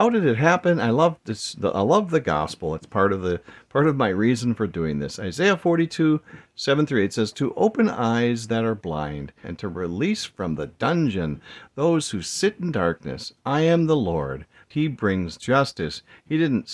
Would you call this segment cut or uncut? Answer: cut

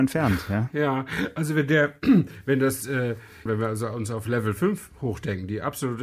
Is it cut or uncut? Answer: cut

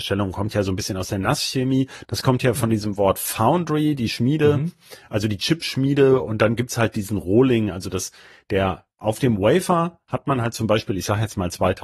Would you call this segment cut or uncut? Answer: cut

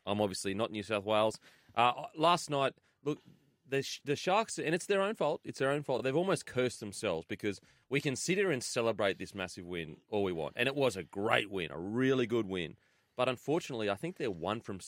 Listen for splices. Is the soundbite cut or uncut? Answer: uncut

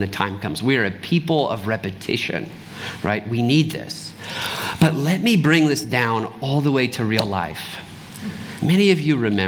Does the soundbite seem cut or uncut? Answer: uncut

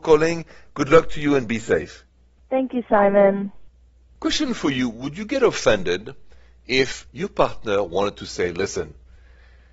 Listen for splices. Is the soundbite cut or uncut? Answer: cut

